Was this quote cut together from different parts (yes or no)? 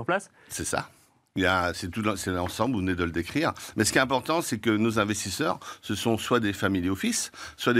no